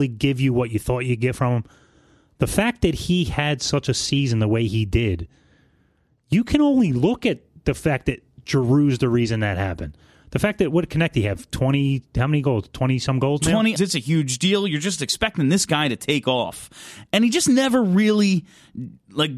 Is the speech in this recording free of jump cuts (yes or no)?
no